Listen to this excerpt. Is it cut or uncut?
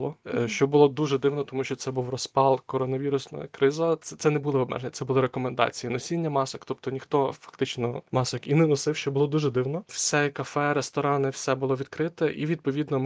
uncut